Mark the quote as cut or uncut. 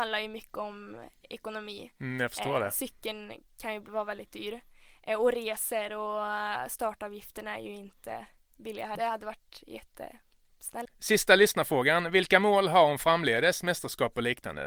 cut